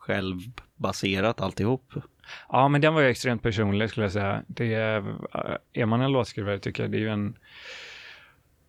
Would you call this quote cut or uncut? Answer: uncut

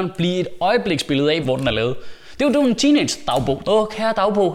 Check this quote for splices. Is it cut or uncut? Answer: cut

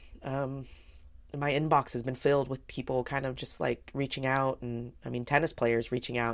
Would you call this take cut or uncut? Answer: uncut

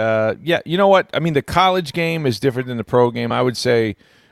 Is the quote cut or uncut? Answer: uncut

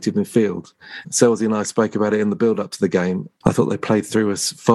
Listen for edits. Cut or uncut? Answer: cut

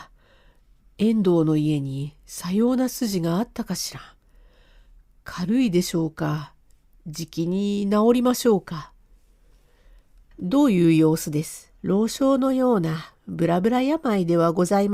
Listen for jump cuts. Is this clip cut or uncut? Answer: cut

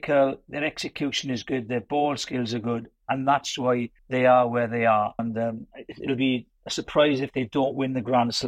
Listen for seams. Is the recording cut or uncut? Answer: cut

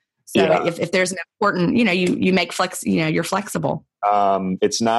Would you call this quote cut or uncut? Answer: cut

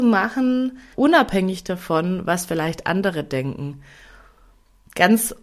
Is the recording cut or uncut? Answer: cut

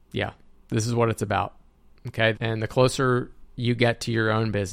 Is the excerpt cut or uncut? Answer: cut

